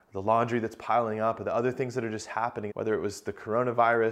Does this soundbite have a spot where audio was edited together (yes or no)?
yes